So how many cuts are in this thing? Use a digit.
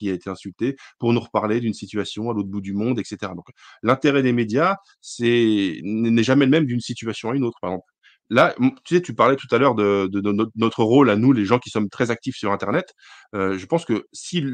0